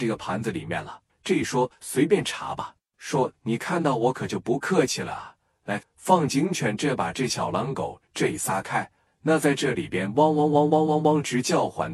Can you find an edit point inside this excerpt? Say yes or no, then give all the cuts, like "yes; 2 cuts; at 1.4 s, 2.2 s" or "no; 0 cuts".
yes; 3 cuts; at 1.1 s, 5.8 s, 9.1 s